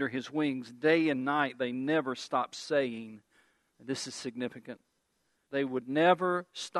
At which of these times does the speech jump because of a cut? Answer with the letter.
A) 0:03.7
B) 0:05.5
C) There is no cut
B